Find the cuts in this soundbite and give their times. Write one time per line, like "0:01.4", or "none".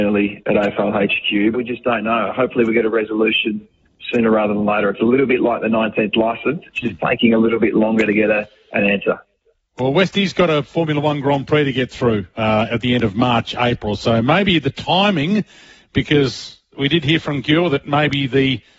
0:01.5